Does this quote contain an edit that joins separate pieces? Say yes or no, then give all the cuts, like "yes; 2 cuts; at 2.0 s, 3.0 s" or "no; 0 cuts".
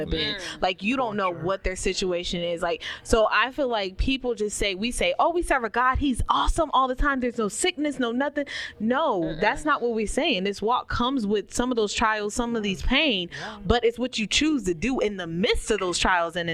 no; 0 cuts